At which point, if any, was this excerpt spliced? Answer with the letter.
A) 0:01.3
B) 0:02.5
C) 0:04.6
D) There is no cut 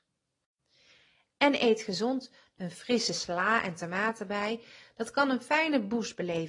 B